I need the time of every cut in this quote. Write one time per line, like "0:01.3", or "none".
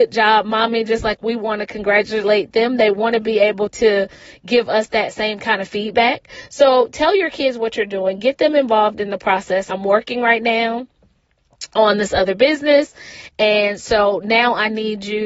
0:09.7

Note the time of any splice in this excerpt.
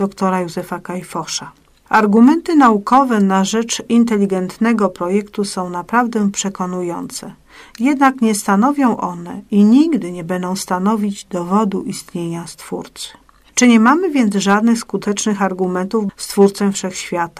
0:16.1

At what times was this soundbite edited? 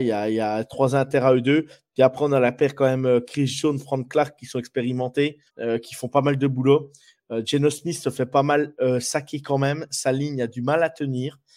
0:05.5

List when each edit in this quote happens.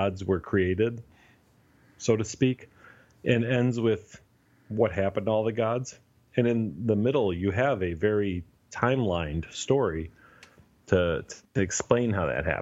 none

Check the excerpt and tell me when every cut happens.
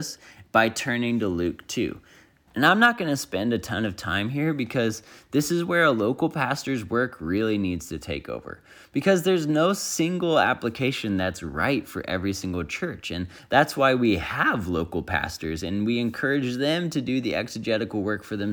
0:02.5

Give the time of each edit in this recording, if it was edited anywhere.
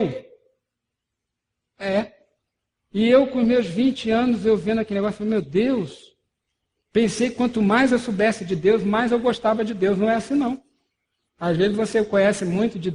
none

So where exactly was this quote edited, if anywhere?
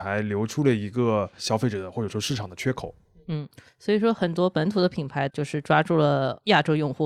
none

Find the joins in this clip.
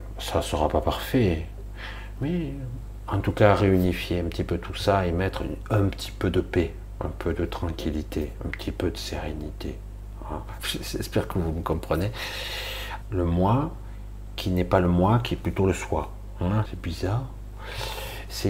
0:10.6
0:13.0
0:16.7

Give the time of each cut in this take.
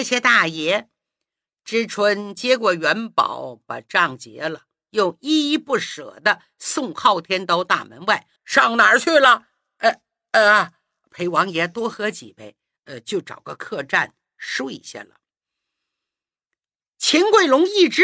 0:08.4

